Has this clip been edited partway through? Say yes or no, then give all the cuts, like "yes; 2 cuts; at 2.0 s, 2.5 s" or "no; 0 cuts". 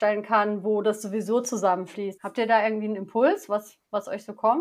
yes; 1 cut; at 2.2 s